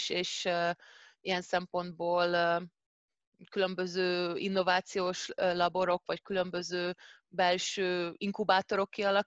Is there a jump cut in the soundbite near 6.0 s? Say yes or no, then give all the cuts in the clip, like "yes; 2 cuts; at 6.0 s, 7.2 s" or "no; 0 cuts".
no; 0 cuts